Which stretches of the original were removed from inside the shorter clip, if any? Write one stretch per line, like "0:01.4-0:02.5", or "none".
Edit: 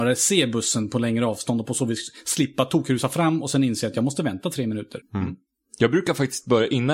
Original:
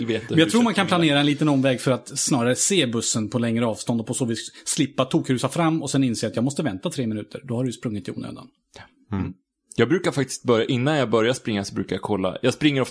0:07.4-0:09.0